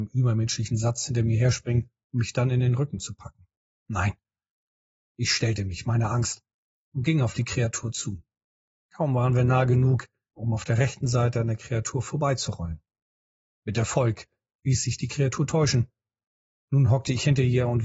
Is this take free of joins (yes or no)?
no